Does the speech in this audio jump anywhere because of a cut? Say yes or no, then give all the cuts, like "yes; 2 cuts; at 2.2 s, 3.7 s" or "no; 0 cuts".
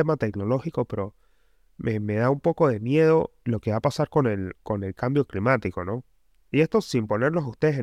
no; 0 cuts